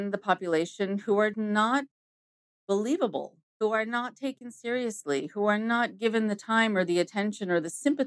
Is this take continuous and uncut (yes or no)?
no